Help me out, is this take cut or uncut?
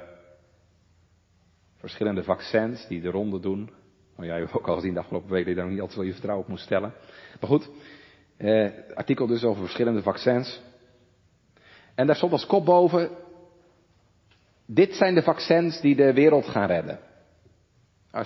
uncut